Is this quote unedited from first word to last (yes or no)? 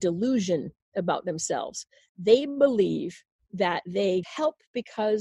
no